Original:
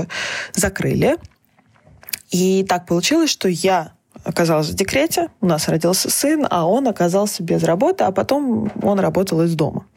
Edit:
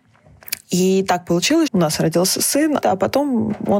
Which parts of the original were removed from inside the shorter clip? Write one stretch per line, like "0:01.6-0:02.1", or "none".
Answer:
0:03.3-0:05.3
0:06.5-0:08.0

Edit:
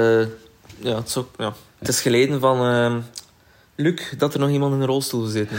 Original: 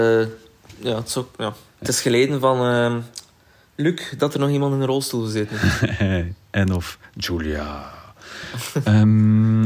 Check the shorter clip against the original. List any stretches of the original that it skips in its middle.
none

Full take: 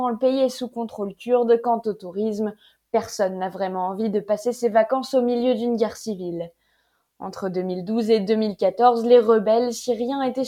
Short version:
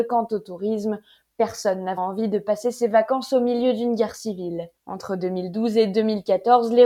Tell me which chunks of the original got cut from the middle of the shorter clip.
0:03.5-0:03.8
0:06.6-0:07.1

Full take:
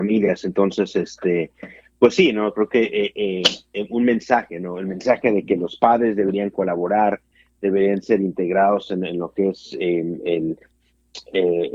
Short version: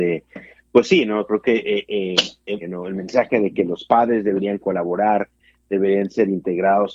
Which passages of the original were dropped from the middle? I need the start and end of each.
0:03.9-0:04.5

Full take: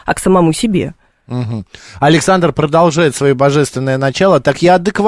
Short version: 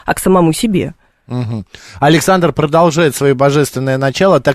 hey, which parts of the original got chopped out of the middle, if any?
none

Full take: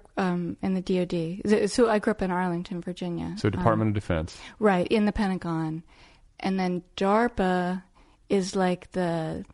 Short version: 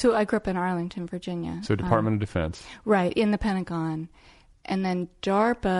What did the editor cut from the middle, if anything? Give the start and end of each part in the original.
none

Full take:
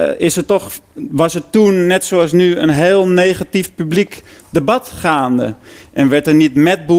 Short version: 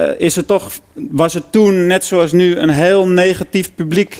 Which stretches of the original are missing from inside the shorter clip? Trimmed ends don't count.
none

